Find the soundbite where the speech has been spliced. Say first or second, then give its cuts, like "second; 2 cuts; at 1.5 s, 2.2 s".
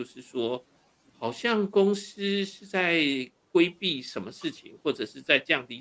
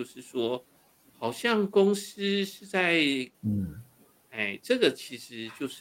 second; 1 cut; at 3.3 s